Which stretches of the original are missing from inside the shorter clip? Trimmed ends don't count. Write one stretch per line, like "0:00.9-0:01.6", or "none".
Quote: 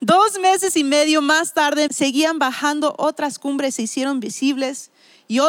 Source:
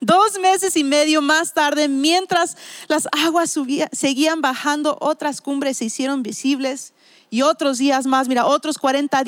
0:01.9-0:03.9